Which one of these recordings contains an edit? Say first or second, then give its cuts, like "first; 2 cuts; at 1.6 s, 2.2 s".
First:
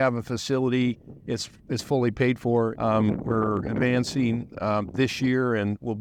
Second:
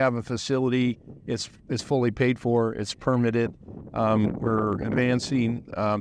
first; 1 cut; at 2.7 s